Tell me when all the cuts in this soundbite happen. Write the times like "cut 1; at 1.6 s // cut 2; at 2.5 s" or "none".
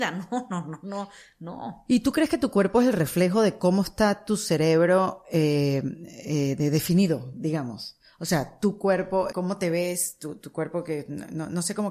cut 1; at 9.3 s